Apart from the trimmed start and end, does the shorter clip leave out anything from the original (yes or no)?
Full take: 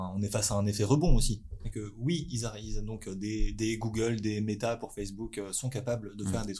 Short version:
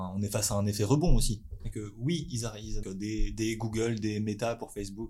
yes